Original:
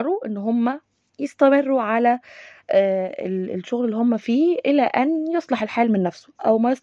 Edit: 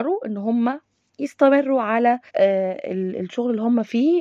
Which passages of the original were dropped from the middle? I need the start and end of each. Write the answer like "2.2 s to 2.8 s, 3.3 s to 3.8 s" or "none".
2.3 s to 2.6 s